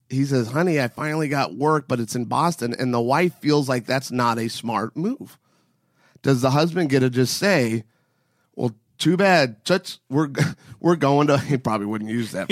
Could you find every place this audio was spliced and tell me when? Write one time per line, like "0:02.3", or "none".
none